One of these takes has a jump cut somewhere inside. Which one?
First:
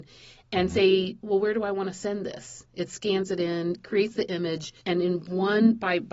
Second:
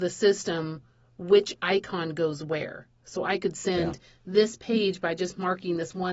first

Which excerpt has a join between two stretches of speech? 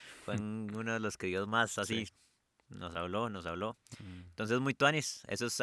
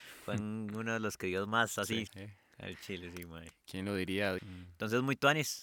second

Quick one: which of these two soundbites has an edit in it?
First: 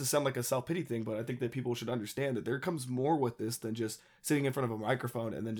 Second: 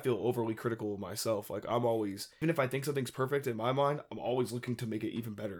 second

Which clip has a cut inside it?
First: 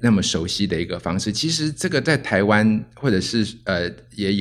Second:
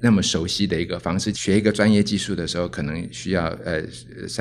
second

